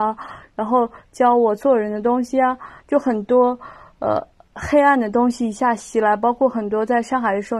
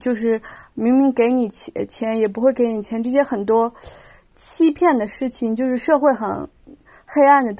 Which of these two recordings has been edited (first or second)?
first